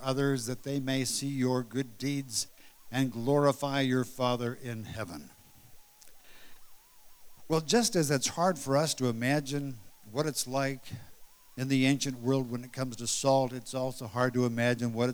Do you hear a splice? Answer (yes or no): no